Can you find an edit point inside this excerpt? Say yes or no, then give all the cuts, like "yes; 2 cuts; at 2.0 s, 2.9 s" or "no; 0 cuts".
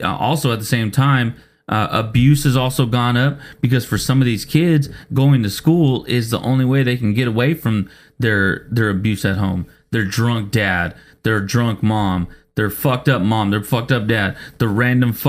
no; 0 cuts